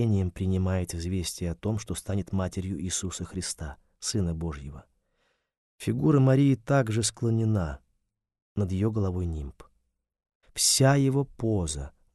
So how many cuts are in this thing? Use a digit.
1